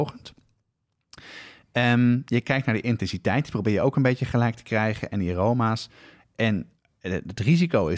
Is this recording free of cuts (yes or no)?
yes